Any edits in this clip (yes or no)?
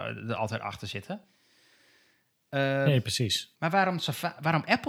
no